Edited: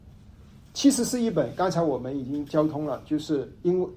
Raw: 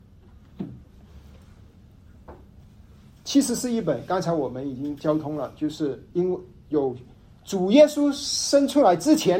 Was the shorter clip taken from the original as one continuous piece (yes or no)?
yes